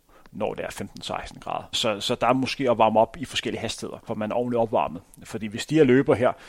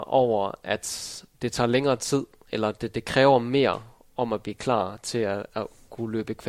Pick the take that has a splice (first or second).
first